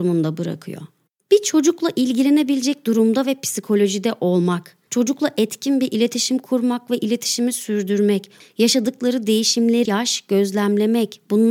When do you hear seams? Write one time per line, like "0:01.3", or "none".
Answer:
0:04.9
0:08.4
0:09.9

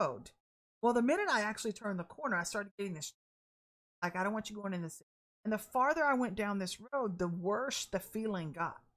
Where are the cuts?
0:05.3

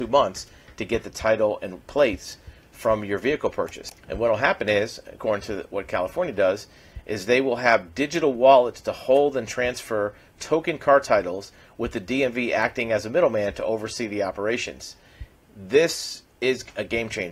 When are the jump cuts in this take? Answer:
none

